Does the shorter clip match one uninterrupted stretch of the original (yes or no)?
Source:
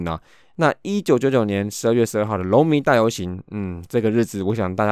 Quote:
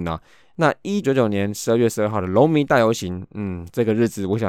no